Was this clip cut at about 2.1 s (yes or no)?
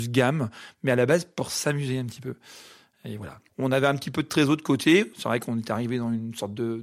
no